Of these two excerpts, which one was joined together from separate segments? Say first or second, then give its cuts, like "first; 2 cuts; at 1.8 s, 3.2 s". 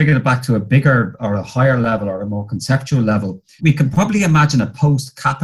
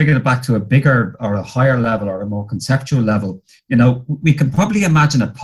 first; 1 cut; at 3.6 s